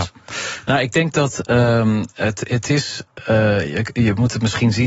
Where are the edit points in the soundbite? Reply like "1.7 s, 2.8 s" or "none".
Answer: none